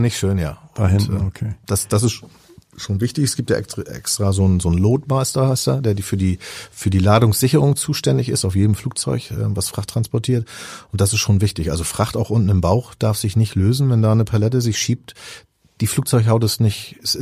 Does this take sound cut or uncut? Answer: uncut